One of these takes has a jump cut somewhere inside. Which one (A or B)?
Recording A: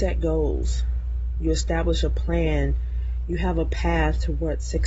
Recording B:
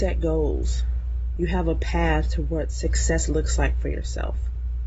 B